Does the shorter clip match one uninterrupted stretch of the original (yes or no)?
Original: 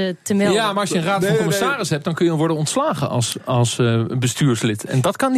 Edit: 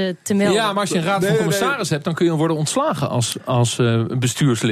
yes